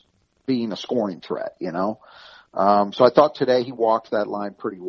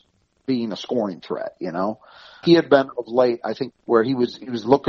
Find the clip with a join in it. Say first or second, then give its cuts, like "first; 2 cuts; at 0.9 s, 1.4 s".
second; 2 cuts; at 2.4 s, 3.7 s